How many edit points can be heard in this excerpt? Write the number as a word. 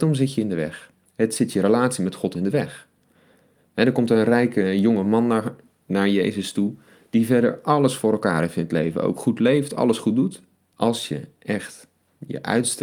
two